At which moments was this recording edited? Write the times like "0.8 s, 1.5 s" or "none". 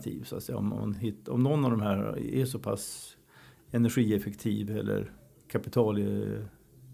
none